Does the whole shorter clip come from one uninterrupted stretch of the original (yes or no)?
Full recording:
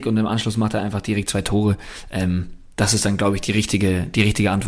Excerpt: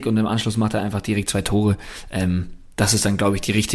yes